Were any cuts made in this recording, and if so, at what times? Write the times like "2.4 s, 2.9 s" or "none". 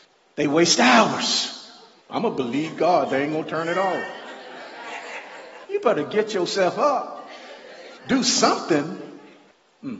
2.1 s, 5.7 s, 8.0 s